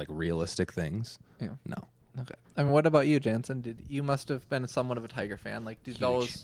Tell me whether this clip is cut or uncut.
uncut